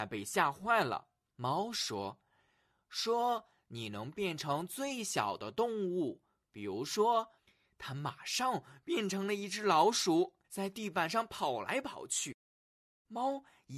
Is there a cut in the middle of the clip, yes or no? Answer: yes